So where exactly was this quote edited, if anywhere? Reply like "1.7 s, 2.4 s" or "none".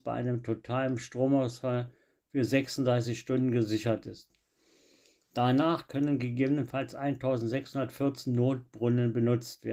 none